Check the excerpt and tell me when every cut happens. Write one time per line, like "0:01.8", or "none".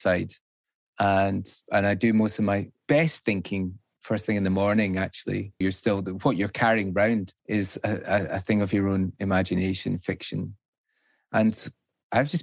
0:05.6
0:07.4